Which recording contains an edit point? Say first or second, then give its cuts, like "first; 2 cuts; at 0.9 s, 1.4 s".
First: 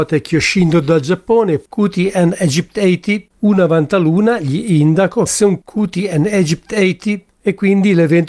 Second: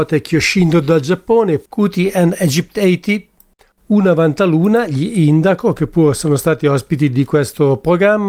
first; 2 cuts; at 3.3 s, 5.3 s